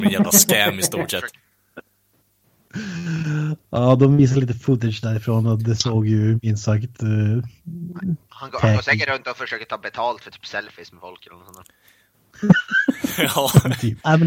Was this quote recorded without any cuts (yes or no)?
yes